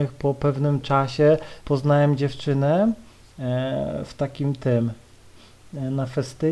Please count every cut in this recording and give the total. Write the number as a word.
one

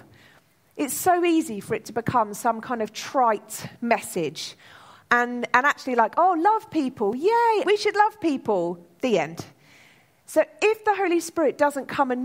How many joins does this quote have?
one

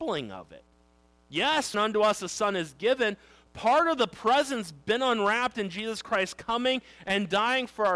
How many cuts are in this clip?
one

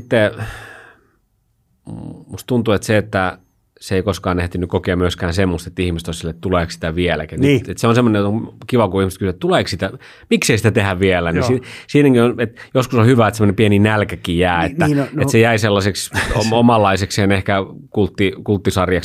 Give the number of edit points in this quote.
zero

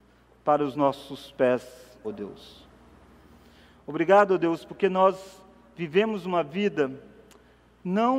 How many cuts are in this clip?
one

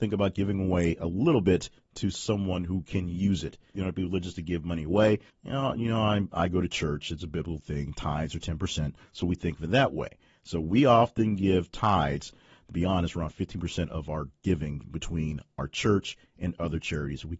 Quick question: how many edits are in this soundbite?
two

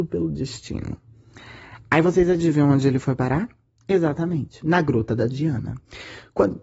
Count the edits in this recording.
zero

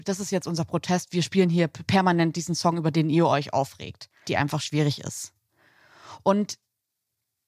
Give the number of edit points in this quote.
one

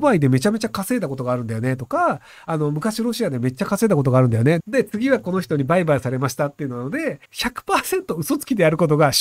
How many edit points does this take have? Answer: two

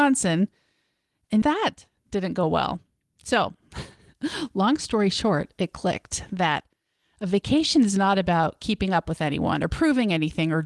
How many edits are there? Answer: one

